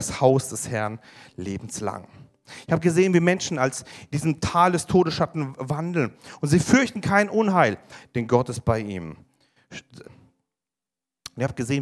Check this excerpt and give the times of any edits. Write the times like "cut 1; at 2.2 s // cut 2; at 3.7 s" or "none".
cut 1; at 10.0 s

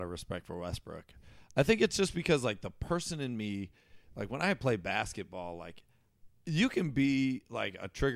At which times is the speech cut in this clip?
none

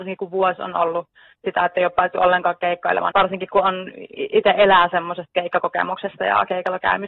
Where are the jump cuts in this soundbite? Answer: cut 1; at 3.1 s

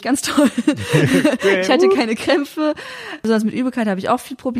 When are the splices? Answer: none

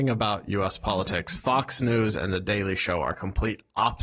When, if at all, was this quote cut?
none

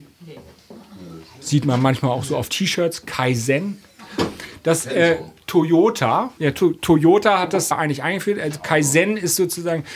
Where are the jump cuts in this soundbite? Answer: cut 1; at 6.4 s // cut 2; at 7.7 s

